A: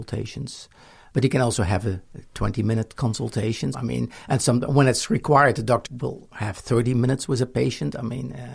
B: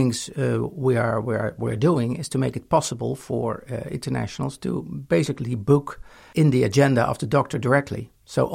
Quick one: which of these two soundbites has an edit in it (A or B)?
A